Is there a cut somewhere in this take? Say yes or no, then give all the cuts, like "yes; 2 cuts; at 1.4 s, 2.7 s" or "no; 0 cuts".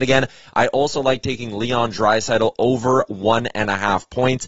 no; 0 cuts